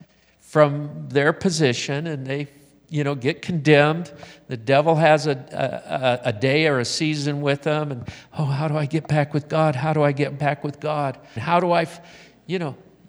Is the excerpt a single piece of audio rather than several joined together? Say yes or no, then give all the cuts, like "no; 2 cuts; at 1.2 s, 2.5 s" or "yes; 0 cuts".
no; 1 cut; at 11.4 s